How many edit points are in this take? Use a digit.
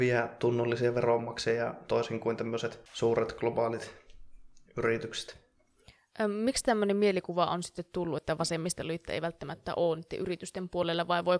0